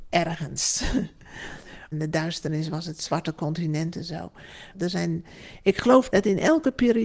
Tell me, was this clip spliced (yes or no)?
yes